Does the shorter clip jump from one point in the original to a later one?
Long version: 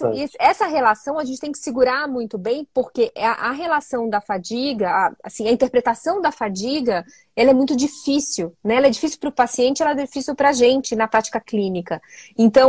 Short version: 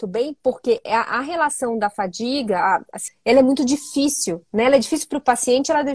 yes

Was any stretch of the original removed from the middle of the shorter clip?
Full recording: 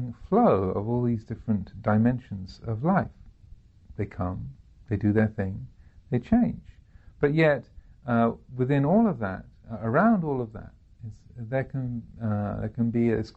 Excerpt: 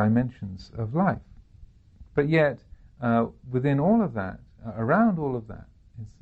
yes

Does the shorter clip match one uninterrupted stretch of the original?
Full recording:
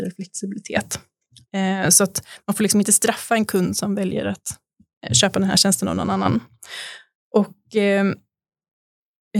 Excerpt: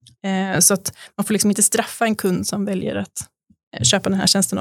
yes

